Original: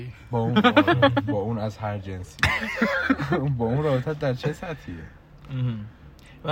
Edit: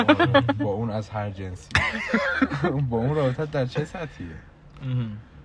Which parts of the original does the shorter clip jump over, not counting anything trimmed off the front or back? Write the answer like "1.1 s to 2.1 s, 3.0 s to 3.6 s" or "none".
none